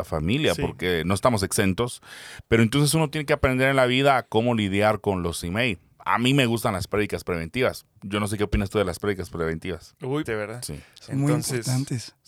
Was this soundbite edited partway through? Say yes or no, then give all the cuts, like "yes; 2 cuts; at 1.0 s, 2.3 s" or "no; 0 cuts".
yes; 1 cut; at 10.3 s